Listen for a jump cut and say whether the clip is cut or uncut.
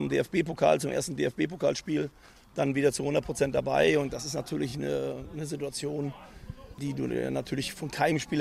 uncut